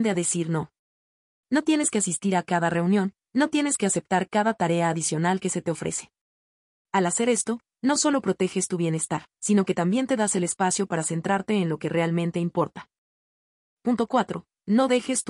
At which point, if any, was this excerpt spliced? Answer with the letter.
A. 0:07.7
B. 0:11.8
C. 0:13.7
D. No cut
C